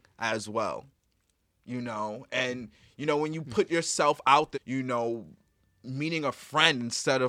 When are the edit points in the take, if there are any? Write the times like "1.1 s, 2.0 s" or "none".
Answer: 4.5 s